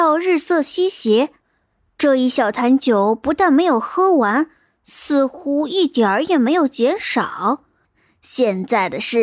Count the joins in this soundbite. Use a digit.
1